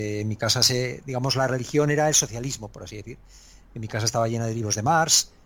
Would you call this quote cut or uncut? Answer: uncut